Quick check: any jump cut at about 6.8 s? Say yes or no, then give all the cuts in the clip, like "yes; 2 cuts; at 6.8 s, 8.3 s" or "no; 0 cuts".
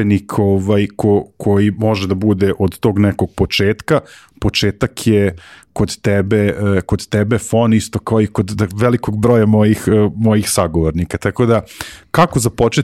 no; 0 cuts